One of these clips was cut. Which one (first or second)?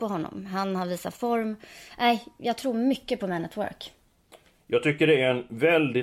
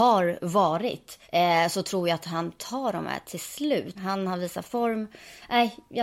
second